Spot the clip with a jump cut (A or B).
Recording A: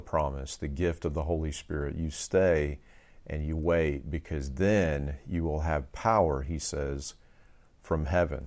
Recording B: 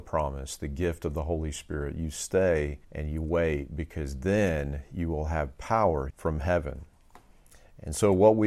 B